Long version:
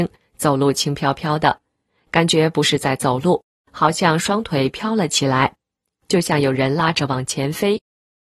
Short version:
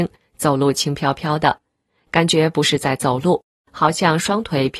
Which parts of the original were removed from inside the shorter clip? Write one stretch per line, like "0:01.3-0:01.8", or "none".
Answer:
none